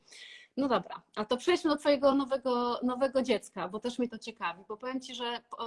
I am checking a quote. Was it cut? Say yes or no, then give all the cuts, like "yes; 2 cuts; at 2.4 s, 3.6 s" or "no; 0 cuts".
no; 0 cuts